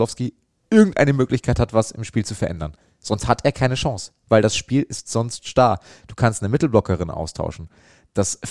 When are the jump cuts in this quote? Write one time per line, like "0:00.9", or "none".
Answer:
none